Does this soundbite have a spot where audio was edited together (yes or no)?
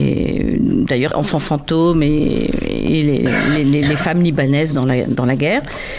yes